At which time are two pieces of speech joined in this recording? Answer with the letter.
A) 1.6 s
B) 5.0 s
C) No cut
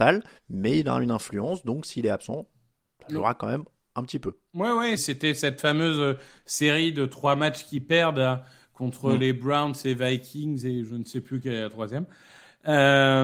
B